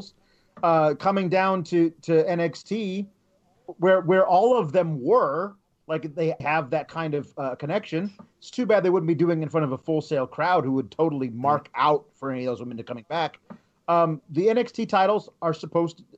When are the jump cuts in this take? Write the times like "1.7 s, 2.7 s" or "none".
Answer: 6.4 s, 14.2 s